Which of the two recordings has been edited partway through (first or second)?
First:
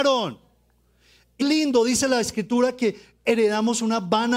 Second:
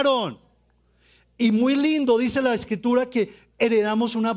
first